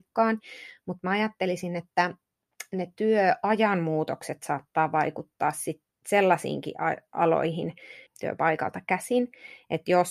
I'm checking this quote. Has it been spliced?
yes; 1 cut; at 8.1 s

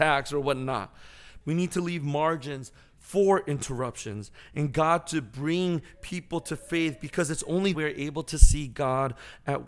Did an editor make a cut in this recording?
yes; 2 cuts; at 1.4 s, 7.7 s

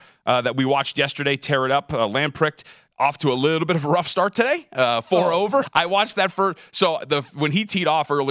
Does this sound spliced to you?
yes; 1 cut; at 5.6 s

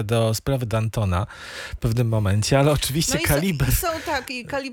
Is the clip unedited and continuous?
yes; 0 cuts

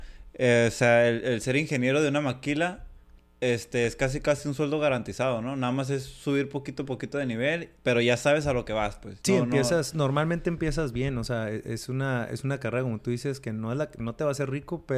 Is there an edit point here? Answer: no; 0 cuts

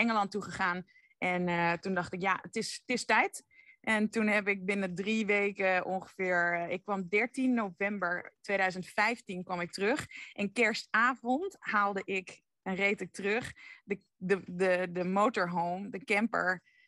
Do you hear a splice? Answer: no; 0 cuts

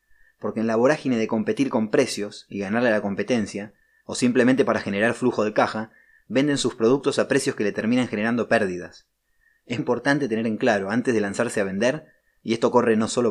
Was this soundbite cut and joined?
yes; 1 cut; at 9.8 s

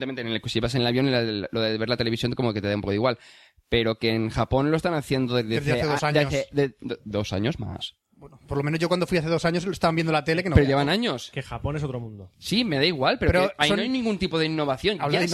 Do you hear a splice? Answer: no; 0 cuts

